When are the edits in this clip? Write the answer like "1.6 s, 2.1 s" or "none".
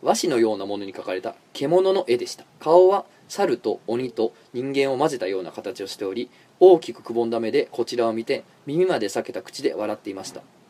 2.5 s